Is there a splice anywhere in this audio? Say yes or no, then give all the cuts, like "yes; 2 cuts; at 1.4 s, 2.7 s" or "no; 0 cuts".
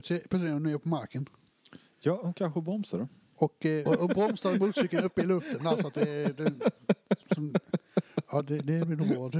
yes; 1 cut; at 3.9 s